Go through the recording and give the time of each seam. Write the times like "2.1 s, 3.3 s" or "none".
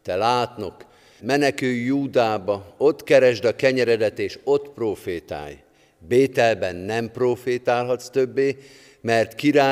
1.2 s